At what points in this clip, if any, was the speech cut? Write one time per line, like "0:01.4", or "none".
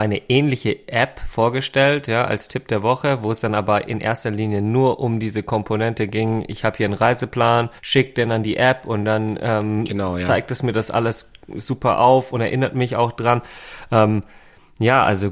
0:07.8